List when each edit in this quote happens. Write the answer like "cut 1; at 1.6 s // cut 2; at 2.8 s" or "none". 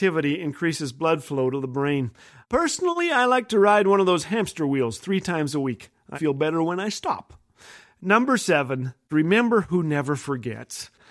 cut 1; at 6.1 s